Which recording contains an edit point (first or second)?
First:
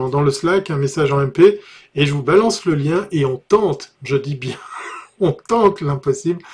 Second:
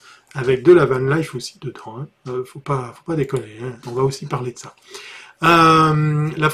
first